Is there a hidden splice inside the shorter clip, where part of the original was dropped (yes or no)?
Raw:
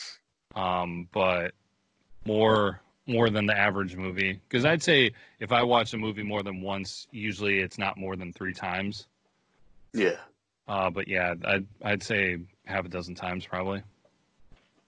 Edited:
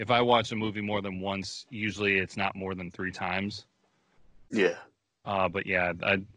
no